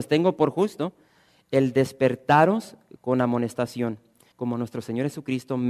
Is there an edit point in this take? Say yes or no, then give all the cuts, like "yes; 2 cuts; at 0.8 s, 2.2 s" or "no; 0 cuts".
yes; 2 cuts; at 1.4 s, 4.3 s